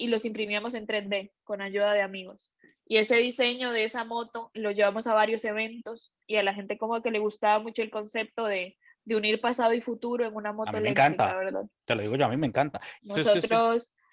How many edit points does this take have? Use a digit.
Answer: 1